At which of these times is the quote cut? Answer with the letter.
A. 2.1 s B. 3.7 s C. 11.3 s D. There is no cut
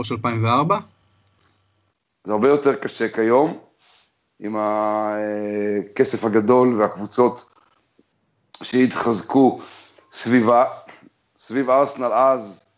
D